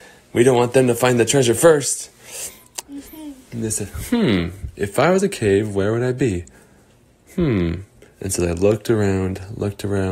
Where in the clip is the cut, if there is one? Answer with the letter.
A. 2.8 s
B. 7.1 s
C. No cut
A